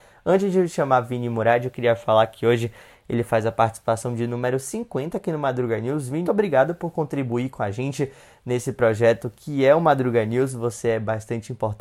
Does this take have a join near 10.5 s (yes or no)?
no